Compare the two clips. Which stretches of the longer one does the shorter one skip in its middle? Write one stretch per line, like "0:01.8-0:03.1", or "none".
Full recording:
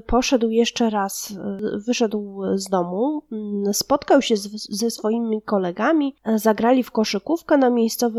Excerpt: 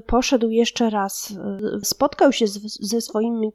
0:01.8-0:03.7